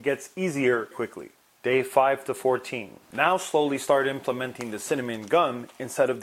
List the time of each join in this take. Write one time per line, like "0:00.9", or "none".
0:00.9